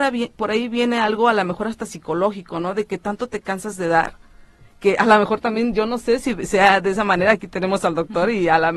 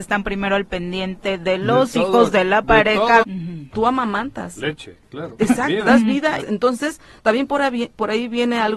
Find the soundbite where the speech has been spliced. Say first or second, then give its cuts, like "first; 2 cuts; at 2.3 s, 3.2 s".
second; 3 cuts; at 3.2 s, 5.4 s, 6.4 s